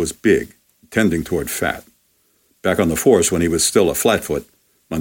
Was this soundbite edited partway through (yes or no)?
no